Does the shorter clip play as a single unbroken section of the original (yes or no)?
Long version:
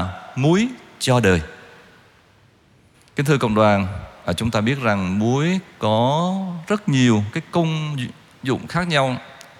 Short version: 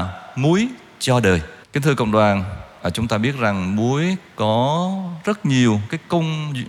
no